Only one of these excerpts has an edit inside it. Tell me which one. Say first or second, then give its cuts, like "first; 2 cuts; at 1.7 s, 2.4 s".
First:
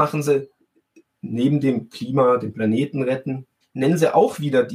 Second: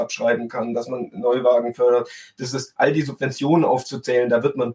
first; 1 cut; at 3.6 s